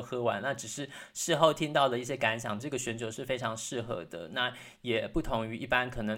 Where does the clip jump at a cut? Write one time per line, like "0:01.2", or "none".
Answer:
0:02.6